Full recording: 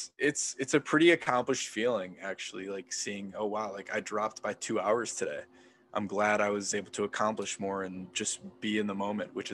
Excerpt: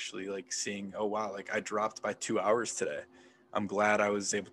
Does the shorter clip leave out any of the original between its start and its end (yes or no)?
no